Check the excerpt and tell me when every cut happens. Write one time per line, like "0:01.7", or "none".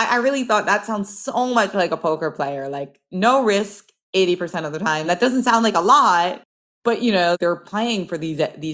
0:05.0